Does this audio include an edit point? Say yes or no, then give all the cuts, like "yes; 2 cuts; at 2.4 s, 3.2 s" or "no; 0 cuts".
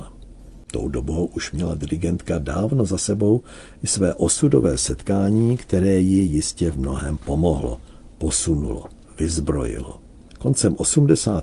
no; 0 cuts